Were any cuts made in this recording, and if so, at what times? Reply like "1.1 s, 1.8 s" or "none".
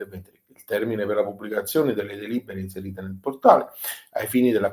none